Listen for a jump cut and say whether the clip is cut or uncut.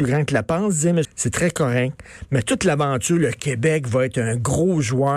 cut